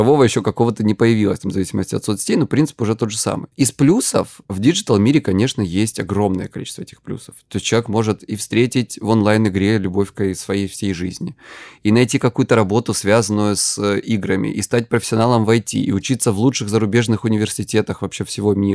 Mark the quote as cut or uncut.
uncut